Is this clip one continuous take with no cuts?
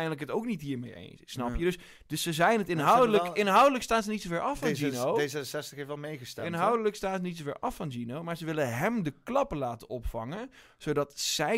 yes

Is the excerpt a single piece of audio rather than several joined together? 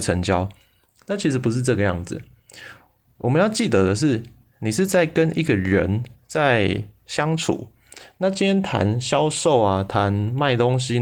yes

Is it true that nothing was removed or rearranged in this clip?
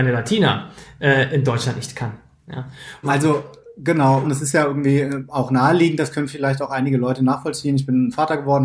no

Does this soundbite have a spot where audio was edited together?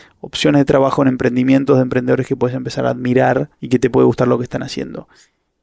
yes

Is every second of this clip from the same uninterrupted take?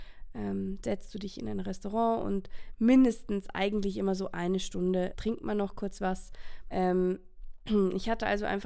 no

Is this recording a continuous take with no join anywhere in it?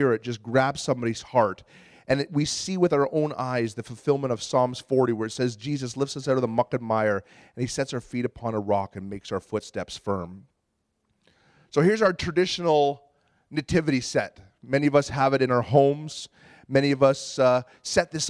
yes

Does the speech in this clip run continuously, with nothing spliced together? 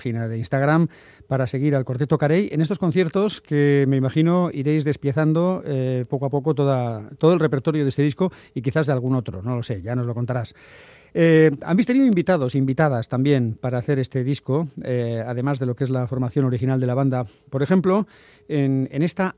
yes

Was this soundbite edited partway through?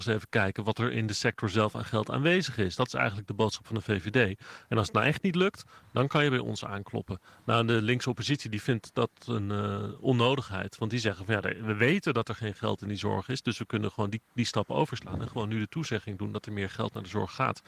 no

